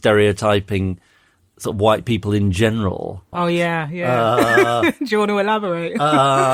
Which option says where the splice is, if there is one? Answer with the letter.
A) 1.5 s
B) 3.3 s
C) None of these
B